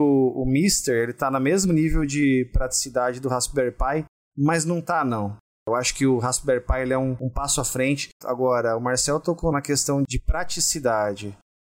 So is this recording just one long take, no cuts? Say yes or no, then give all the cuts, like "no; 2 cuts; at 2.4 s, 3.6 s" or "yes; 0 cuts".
no; 2 cuts; at 8.2 s, 9.5 s